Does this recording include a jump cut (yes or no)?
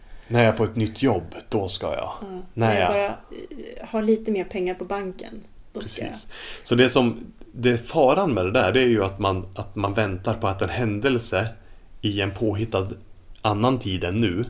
no